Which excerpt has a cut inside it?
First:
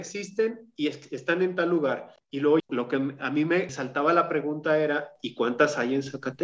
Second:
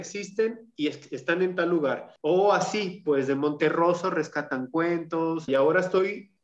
second; 2 cuts; at 2.2 s, 5.5 s

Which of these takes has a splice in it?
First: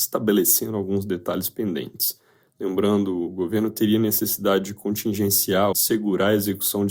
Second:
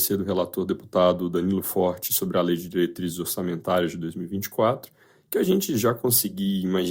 first; 2 cuts; at 2.5 s, 5.7 s

